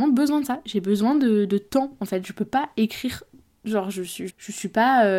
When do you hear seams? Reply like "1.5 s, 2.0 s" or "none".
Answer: 4.3 s